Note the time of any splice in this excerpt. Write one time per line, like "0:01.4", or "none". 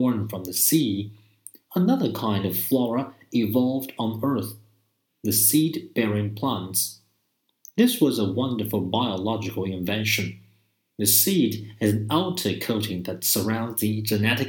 none